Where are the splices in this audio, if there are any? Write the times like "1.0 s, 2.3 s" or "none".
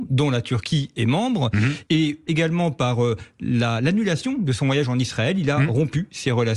1.9 s